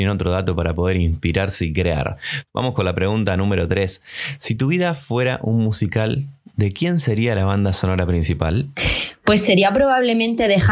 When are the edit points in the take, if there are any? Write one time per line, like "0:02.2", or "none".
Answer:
0:02.5